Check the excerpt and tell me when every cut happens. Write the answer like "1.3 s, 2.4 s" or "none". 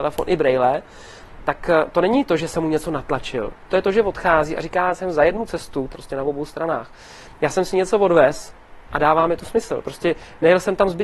5.9 s

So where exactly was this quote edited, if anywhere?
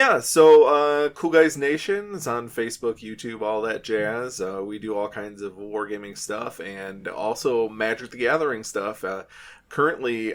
none

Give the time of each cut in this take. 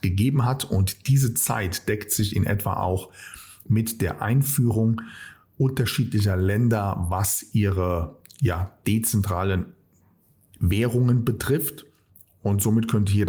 none

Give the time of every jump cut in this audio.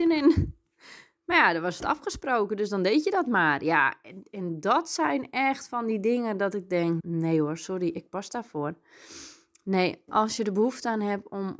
7.0 s

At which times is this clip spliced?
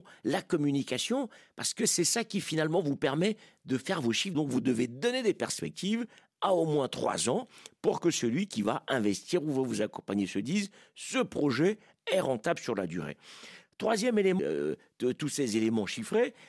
4.3 s, 14.4 s

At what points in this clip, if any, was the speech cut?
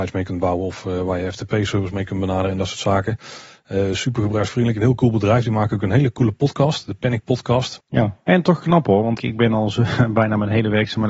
7.8 s, 9.2 s

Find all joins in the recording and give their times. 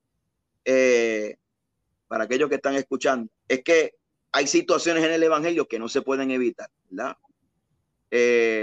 3.4 s, 6.8 s

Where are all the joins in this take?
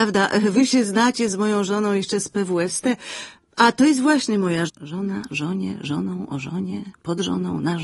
4.7 s

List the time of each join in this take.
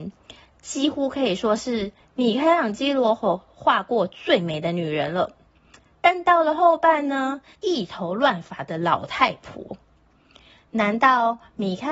7.5 s

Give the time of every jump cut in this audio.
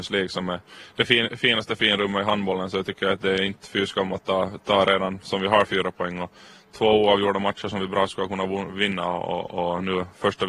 none

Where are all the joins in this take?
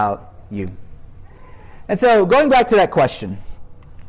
1.9 s

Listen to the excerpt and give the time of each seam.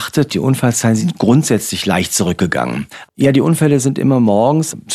3.0 s

